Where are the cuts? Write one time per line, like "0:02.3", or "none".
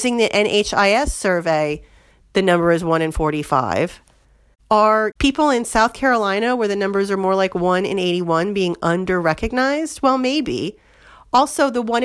none

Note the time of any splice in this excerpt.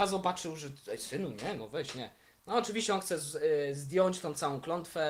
none

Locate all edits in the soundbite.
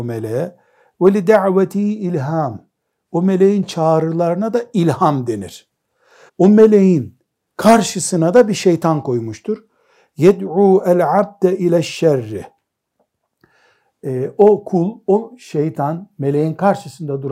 0:06.3

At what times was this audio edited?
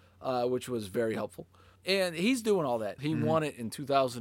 0:01.8
0:03.0

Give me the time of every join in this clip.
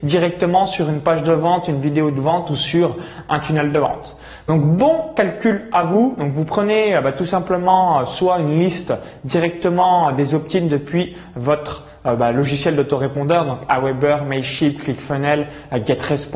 none

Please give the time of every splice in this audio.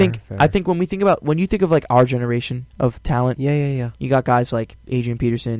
0:02.7

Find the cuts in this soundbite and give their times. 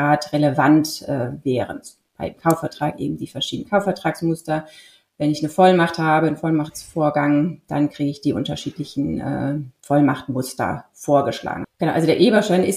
0:11.6

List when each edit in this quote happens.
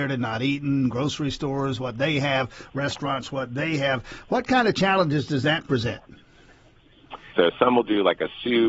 0:07.3

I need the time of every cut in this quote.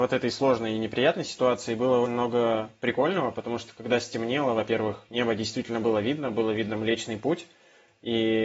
0:02.0

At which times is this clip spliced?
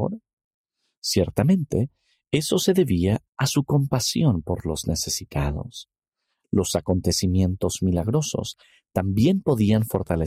0:03.3
0:06.4

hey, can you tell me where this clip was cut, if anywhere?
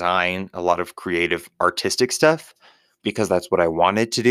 none

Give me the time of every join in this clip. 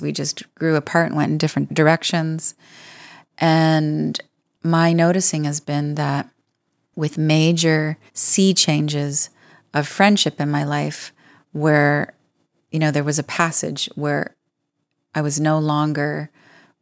0:08.1

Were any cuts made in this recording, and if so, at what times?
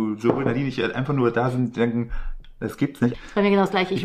0:03.1

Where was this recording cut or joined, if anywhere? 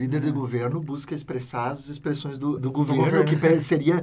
0:02.6

